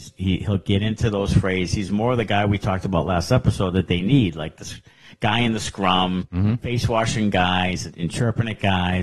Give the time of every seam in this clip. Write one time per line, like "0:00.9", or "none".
0:07.9